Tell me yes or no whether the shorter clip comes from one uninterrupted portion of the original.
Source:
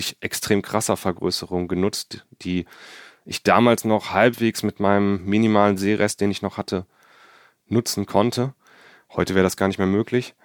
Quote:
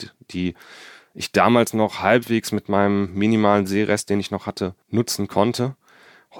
no